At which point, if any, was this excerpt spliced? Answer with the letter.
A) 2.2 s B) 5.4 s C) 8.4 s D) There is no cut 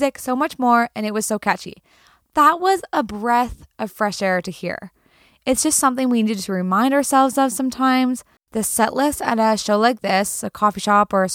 C